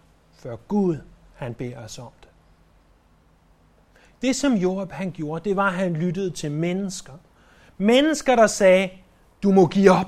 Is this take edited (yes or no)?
no